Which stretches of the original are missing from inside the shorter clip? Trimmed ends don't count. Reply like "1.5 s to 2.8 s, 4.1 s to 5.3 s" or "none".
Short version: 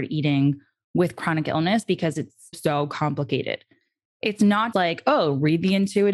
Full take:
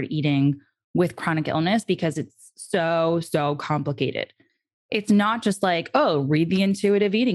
2.5 s to 3.2 s, 5.4 s to 5.6 s